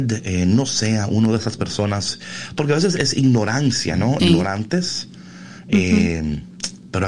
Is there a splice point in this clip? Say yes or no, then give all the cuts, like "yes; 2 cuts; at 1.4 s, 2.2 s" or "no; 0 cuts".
yes; 1 cut; at 4.2 s